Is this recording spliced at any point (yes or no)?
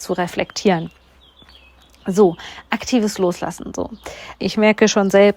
yes